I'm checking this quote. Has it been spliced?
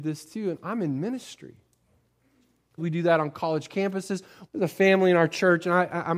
yes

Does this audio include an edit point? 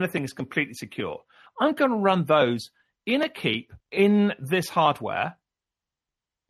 yes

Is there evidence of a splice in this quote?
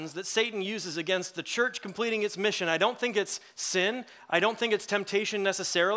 no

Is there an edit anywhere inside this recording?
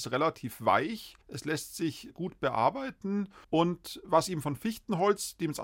yes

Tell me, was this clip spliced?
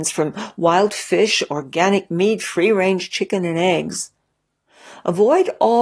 no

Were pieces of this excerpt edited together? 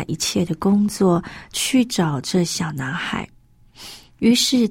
no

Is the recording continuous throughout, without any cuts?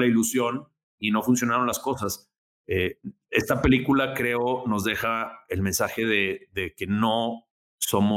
yes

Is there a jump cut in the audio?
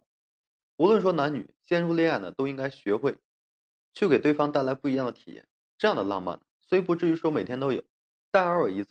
no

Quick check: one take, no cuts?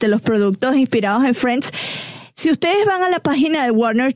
yes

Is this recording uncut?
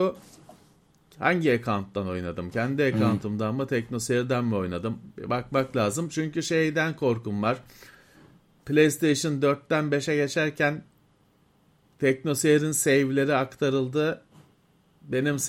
yes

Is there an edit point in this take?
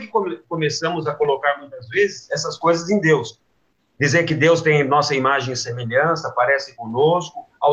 no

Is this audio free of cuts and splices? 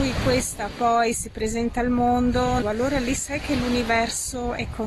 no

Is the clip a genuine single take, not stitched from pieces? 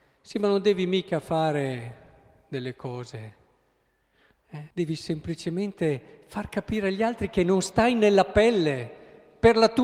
no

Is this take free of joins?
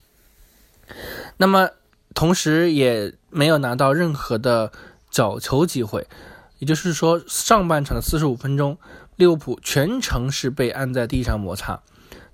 yes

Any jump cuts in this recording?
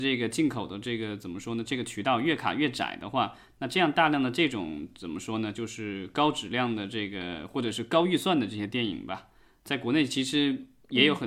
no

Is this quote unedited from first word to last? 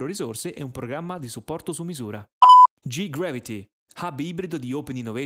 yes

